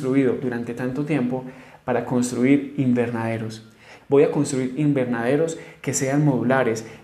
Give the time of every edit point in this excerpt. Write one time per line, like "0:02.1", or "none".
0:04.0